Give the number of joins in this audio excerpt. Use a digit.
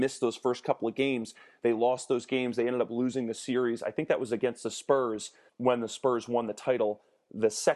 1